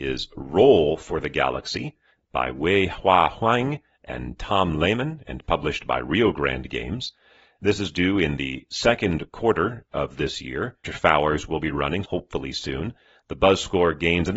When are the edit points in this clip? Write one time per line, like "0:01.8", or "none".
0:10.8
0:12.0